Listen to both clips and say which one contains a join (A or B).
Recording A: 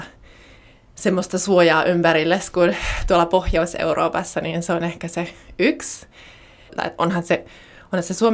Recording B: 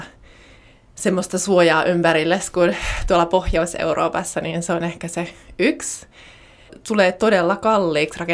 A